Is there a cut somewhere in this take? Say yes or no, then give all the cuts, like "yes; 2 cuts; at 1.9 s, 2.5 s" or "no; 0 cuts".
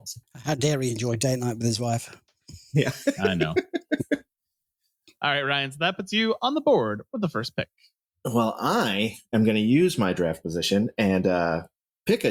no; 0 cuts